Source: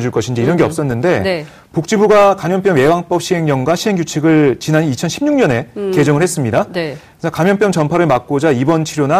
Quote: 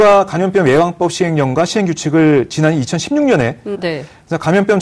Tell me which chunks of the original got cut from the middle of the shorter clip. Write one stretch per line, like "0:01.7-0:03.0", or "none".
0:05.8-0:06.7